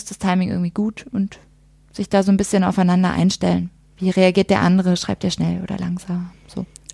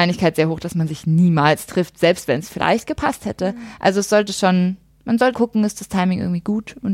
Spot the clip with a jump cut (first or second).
second